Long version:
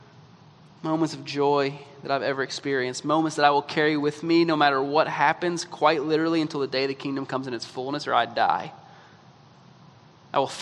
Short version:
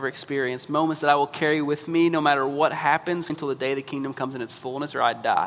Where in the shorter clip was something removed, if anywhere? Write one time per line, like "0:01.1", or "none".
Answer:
0:03.3